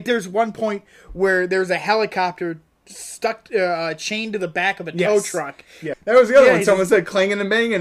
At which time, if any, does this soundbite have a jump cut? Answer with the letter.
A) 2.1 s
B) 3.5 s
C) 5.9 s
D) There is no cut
C